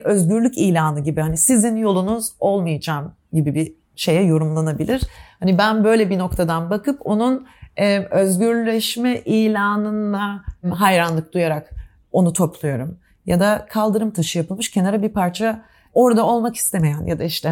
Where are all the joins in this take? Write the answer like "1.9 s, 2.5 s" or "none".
none